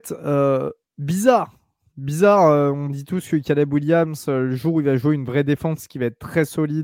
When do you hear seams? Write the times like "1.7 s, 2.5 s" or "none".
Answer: none

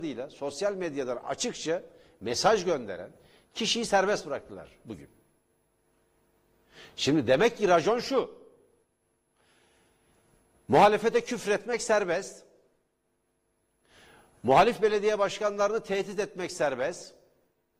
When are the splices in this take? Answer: none

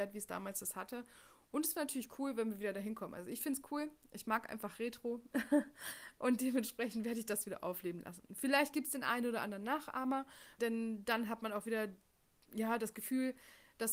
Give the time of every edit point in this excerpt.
10.6 s

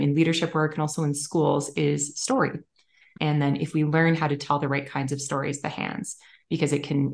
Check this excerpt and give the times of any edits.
3.2 s

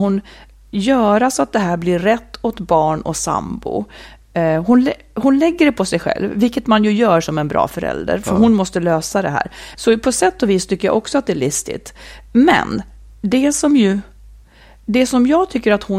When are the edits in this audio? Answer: 9.7 s

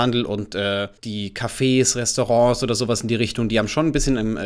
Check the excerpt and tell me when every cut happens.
1.0 s

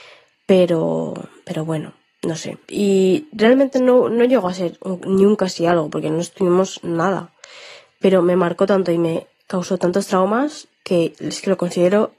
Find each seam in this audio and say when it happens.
none

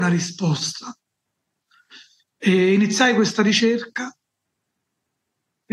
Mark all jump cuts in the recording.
none

